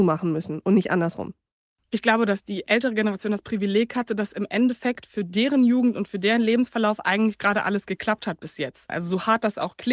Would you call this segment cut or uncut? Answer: cut